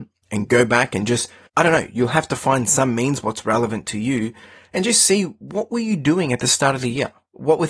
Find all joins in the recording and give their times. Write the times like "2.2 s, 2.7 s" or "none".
1.5 s